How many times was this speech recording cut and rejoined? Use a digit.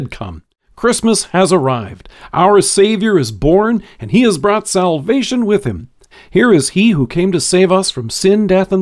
1